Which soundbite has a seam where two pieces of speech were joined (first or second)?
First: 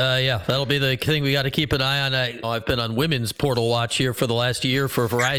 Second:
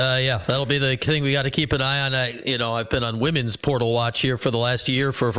first